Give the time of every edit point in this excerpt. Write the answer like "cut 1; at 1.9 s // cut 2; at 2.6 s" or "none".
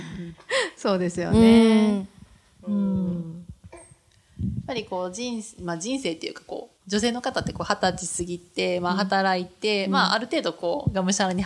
cut 1; at 6.8 s